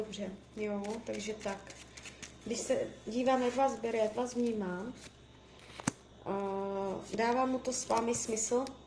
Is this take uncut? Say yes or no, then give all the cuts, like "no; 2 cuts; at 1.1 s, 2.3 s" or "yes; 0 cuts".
no; 1 cut; at 2.4 s